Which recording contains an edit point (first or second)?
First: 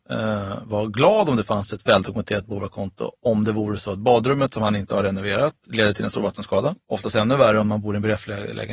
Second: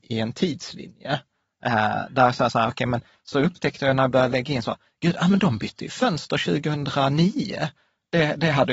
first